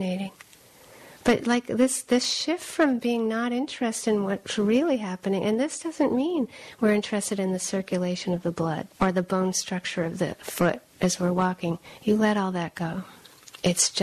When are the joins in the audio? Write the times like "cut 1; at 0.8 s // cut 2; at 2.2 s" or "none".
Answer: cut 1; at 8.9 s